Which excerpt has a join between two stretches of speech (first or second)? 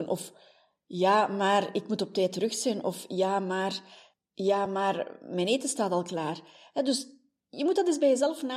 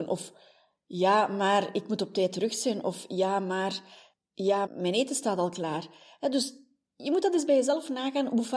second